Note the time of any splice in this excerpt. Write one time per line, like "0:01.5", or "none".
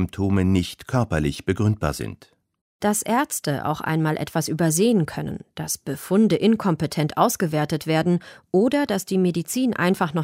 none